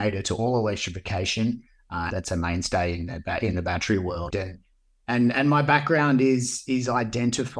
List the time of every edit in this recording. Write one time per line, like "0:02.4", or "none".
0:02.1
0:04.3